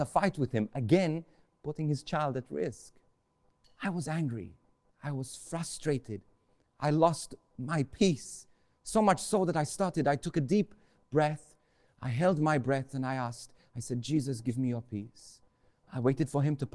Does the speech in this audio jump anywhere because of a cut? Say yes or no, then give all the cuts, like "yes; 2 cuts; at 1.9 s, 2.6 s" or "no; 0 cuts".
no; 0 cuts